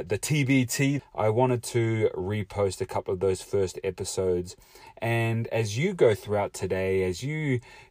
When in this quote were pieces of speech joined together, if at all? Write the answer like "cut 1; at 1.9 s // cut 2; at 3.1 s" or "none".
cut 1; at 1.0 s